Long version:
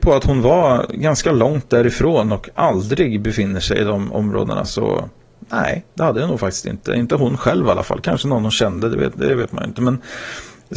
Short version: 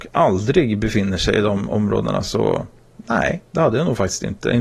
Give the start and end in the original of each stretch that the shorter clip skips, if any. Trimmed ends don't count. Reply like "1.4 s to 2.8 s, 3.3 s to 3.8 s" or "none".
none